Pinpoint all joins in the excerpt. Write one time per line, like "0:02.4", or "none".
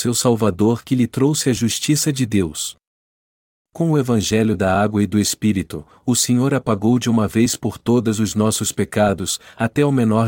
none